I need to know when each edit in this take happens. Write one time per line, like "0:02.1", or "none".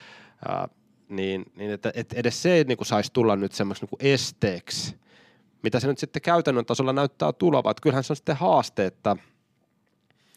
none